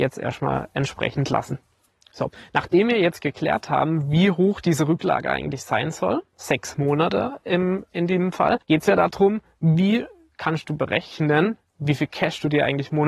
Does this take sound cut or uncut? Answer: cut